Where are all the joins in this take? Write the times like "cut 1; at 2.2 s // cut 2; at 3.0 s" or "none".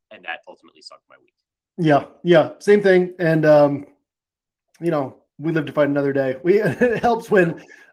none